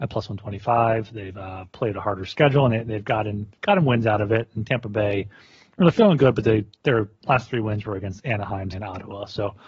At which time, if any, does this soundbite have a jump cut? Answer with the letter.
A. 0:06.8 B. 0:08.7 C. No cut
B